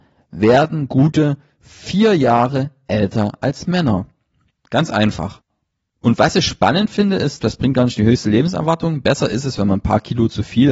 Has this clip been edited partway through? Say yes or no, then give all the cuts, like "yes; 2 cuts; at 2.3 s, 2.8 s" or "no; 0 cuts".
yes; 2 cuts; at 4.5 s, 7.4 s